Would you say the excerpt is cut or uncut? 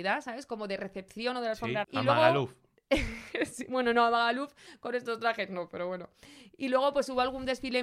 cut